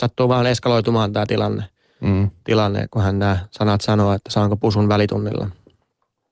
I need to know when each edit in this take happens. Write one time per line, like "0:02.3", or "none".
none